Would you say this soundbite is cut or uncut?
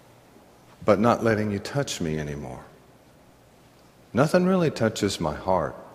uncut